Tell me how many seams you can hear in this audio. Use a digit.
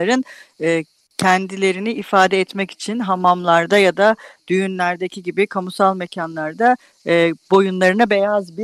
0